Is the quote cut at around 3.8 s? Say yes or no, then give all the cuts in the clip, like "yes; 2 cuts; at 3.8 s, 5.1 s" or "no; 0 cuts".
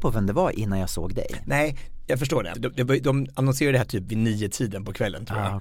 no; 1 cut; at 2.5 s